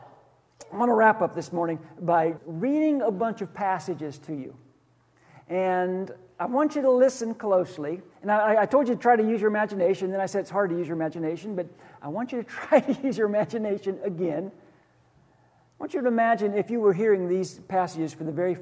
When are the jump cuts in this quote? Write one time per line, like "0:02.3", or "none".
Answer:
0:02.4